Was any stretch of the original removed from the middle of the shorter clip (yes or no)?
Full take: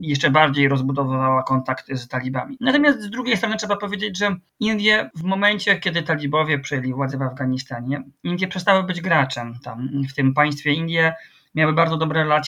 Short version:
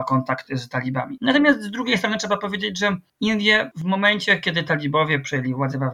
no